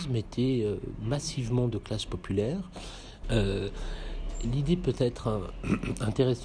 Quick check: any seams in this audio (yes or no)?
yes